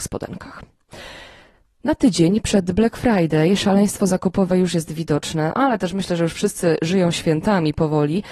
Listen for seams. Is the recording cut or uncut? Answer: uncut